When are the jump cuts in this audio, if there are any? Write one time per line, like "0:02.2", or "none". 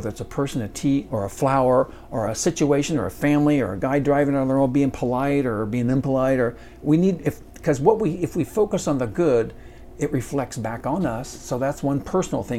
0:01.1